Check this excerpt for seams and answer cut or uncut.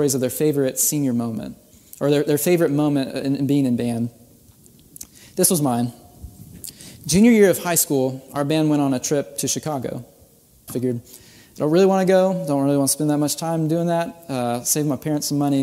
cut